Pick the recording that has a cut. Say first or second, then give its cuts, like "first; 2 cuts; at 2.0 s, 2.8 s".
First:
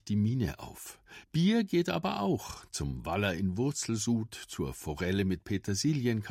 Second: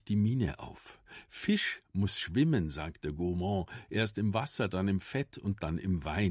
first; 1 cut; at 1.2 s